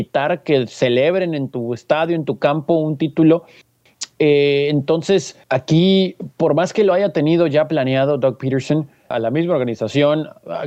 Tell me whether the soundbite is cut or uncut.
cut